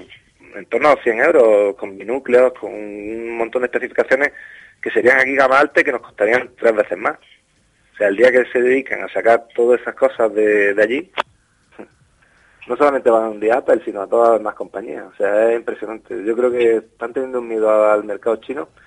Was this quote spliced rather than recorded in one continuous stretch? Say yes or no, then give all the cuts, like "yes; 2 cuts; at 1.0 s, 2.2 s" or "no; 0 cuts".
no; 0 cuts